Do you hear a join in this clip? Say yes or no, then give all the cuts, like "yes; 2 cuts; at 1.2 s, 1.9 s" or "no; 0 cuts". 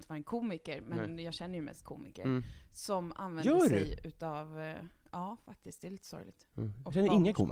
no; 0 cuts